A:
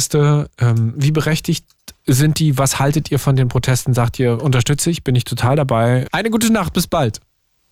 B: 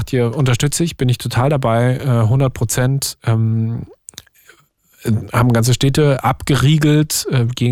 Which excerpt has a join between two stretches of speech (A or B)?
A